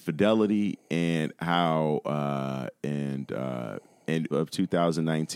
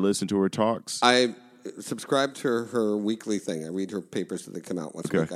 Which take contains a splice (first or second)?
first